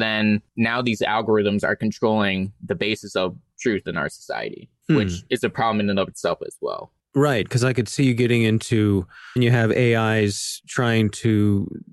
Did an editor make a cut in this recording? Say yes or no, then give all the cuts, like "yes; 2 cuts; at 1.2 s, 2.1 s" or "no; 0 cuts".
yes; 2 cuts; at 4.8 s, 9.4 s